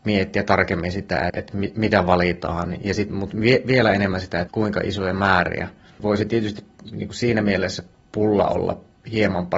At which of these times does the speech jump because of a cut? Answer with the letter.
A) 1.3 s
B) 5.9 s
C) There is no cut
A